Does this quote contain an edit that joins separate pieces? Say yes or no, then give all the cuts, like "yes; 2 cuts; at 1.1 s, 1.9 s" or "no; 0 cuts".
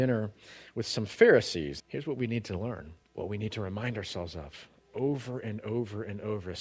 yes; 2 cuts; at 1.8 s, 3.0 s